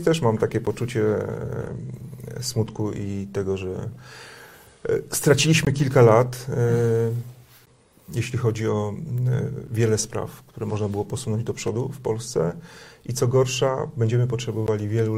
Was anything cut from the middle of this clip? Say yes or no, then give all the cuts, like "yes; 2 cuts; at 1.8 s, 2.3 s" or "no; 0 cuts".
no; 0 cuts